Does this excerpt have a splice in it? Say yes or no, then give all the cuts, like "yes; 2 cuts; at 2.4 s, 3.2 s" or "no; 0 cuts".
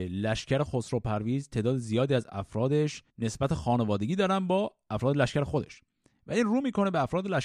yes; 1 cut; at 3.1 s